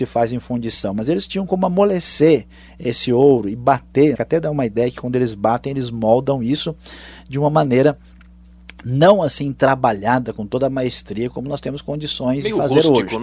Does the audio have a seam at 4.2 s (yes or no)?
yes